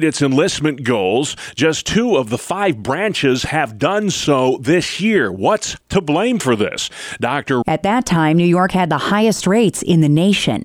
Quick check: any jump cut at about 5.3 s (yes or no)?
no